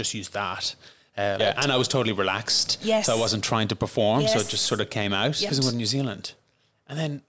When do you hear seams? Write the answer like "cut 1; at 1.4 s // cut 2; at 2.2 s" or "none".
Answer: cut 1; at 1.4 s // cut 2; at 5.5 s